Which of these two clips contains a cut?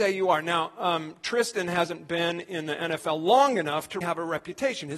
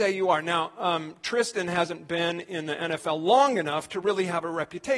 first; 1 cut; at 4.0 s

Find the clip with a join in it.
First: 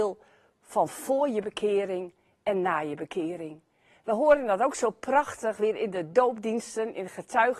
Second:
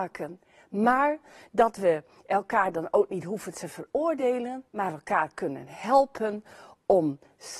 second; 1 cut; at 4.7 s

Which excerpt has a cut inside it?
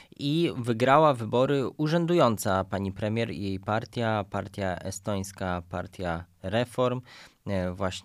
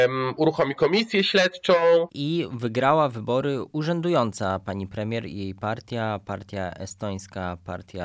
second; 1 cut; at 2.1 s

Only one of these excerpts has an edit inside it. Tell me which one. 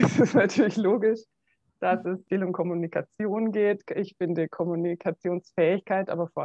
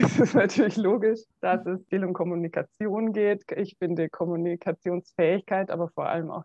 second; 1 cut; at 1.3 s

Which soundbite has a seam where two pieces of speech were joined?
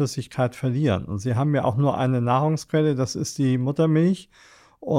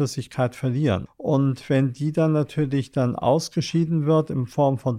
second; 1 cut; at 1.1 s

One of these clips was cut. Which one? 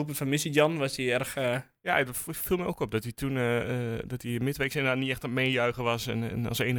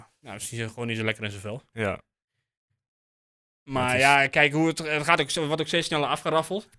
second; 1 cut; at 1.7 s

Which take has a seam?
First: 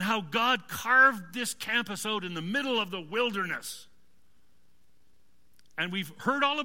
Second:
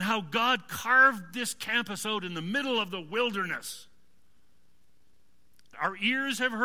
second; 1 cut; at 5.7 s

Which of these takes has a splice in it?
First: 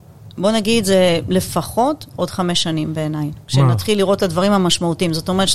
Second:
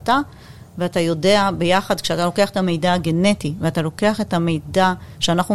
first; 1 cut; at 3.4 s

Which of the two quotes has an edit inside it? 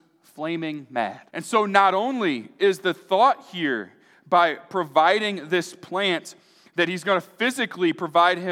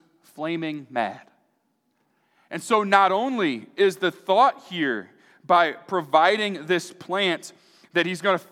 first; 1 cut; at 1.3 s

